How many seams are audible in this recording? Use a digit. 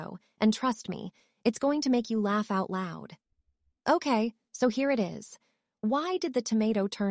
0